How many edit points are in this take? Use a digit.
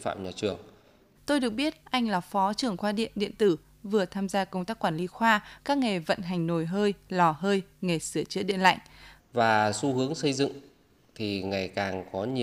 3